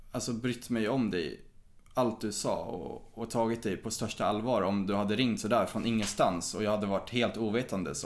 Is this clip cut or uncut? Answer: uncut